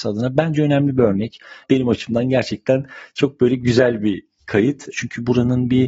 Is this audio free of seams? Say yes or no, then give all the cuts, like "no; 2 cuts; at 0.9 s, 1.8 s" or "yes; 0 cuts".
no; 2 cuts; at 1.6 s, 4.9 s